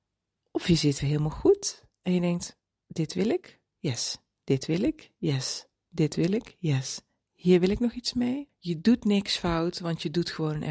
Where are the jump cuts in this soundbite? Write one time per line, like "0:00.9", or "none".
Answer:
0:01.0
0:08.5